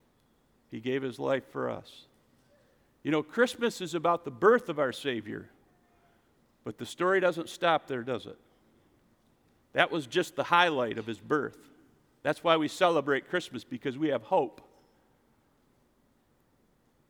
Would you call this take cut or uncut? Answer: uncut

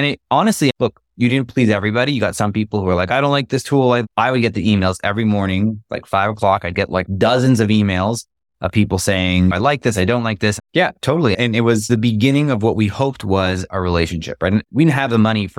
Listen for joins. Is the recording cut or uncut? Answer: cut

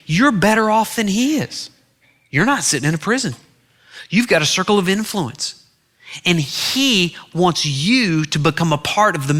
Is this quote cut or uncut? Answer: uncut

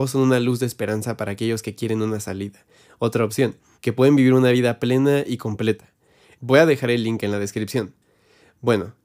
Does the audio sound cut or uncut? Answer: cut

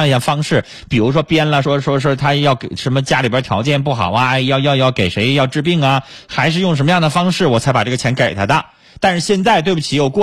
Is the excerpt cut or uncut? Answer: uncut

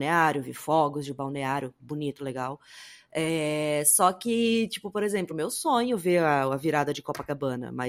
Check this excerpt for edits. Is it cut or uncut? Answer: uncut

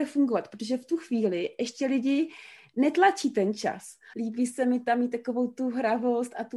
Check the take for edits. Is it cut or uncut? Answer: cut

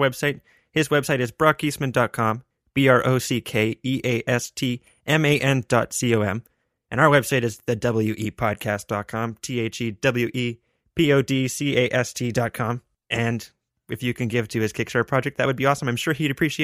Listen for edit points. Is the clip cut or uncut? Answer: uncut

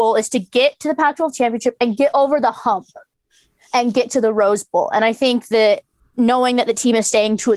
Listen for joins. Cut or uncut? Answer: uncut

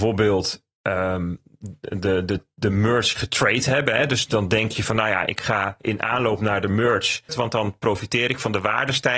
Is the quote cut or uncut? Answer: cut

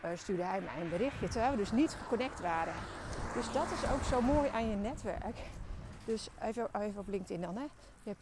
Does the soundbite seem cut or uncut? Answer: uncut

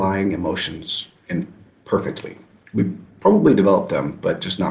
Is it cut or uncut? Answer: uncut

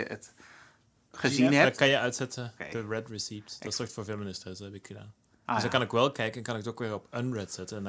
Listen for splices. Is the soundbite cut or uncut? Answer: cut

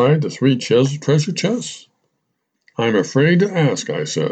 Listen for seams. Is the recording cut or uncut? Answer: uncut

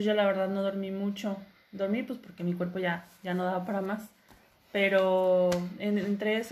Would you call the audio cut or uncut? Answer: uncut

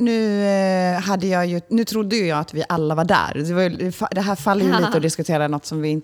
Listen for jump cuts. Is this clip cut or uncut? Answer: uncut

